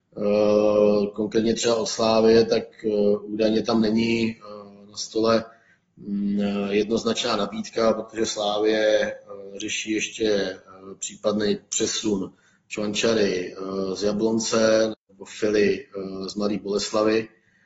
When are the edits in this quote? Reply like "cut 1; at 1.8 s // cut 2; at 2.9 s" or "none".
cut 1; at 14.9 s